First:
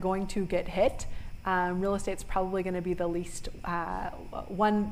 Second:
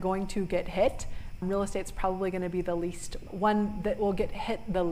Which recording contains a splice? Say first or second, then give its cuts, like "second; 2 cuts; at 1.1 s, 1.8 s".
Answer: second; 2 cuts; at 1.4 s, 3.3 s